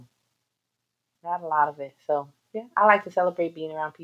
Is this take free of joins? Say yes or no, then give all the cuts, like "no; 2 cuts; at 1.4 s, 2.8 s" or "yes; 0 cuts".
no; 1 cut; at 1.1 s